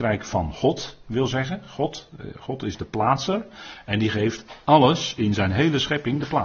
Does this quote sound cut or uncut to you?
uncut